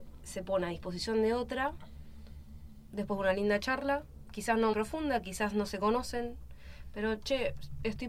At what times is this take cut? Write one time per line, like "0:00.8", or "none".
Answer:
0:04.7